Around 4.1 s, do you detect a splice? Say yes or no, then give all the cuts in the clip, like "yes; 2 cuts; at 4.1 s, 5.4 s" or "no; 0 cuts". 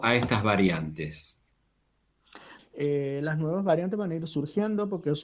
no; 1 cut; at 2.6 s